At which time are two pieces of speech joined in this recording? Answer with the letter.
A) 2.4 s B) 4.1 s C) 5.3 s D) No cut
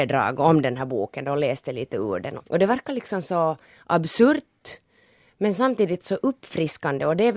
A